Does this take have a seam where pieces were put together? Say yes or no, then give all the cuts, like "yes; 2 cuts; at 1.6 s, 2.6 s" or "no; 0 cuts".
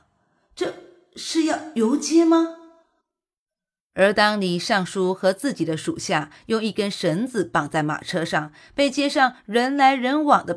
no; 0 cuts